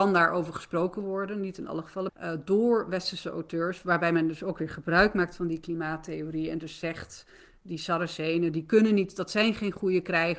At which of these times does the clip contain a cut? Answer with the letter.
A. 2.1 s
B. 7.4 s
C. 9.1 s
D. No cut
A